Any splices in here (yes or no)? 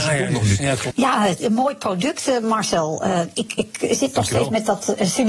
yes